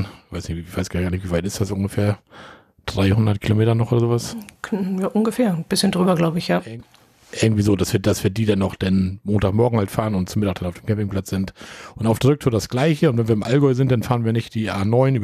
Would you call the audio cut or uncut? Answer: uncut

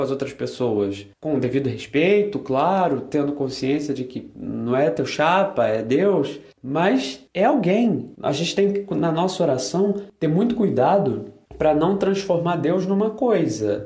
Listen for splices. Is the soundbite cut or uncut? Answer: cut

